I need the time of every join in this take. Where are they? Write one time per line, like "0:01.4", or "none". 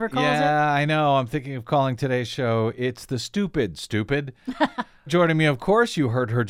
0:05.1